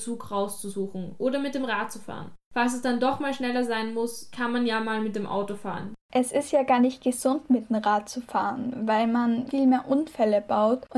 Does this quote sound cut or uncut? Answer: cut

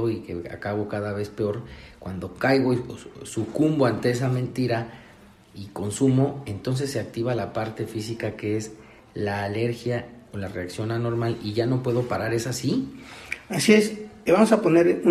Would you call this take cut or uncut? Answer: uncut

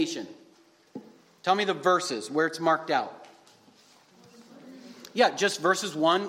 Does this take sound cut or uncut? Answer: uncut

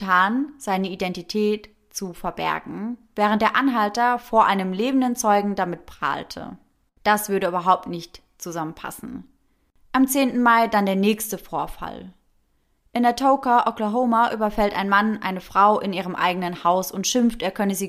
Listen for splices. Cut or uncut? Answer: uncut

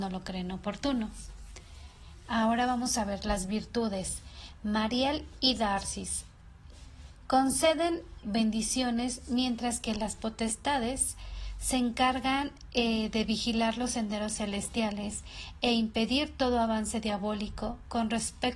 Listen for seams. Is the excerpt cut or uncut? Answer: cut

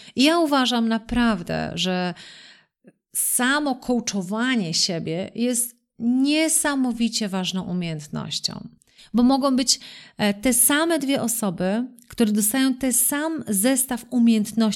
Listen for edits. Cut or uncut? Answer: cut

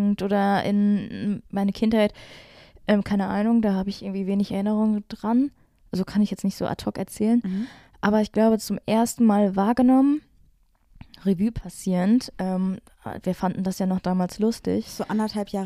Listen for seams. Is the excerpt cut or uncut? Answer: uncut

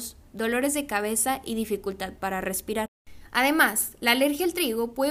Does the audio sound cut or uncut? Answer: uncut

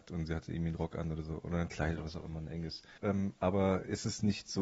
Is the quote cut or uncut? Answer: cut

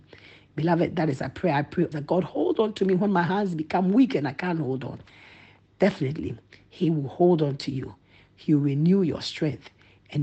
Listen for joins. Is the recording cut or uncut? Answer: cut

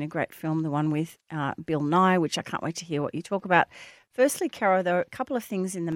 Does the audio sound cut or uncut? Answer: uncut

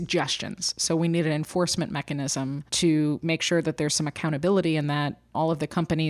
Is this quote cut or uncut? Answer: cut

